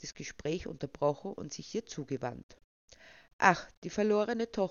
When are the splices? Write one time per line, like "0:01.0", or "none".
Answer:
none